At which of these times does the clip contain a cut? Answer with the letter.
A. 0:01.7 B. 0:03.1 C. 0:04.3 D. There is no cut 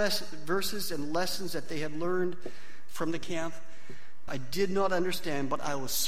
C